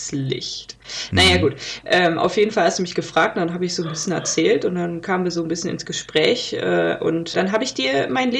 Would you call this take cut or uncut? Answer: cut